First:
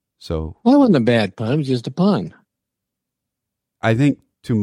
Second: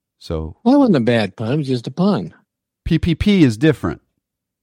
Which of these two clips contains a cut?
second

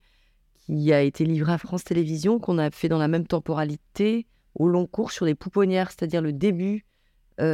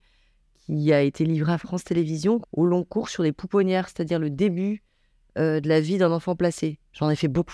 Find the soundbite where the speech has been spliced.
second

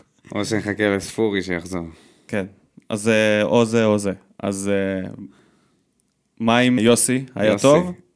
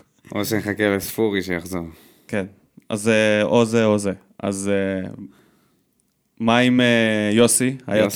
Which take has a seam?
first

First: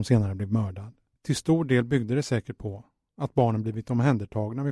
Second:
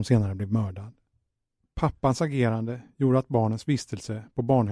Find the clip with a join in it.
first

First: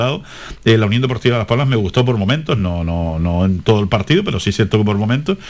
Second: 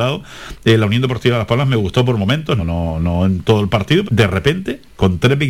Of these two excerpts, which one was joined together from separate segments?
second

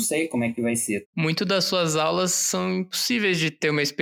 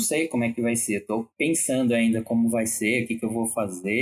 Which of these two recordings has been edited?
first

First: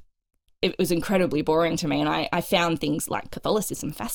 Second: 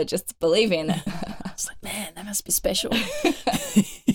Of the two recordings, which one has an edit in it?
second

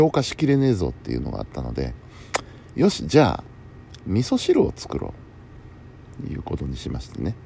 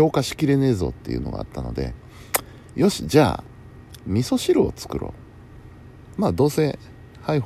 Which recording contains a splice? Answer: second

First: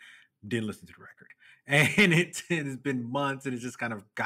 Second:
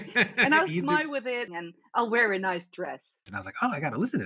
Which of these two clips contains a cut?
second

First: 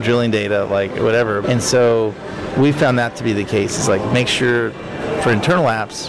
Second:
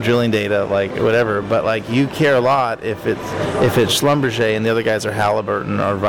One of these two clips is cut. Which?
first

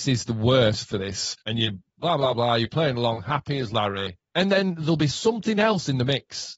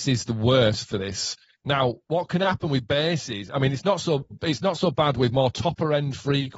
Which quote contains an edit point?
first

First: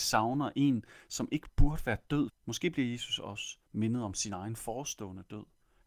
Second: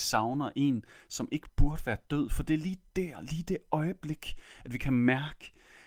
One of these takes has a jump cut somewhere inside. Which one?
first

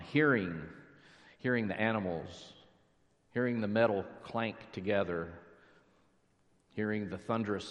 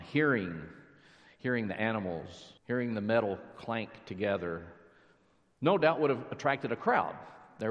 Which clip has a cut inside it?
second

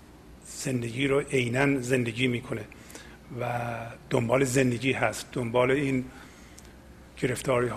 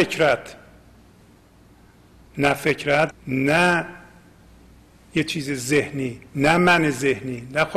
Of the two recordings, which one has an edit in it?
second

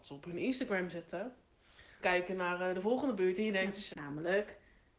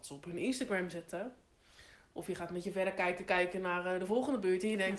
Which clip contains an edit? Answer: first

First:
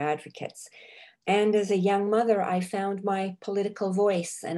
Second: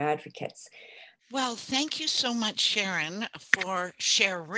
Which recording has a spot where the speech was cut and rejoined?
second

